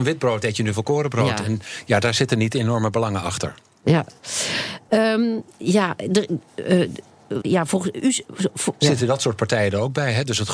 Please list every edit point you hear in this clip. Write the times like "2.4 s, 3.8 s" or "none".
5.5 s, 7.4 s, 8.8 s